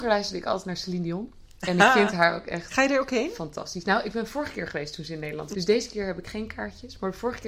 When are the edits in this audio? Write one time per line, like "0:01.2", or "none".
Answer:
0:05.5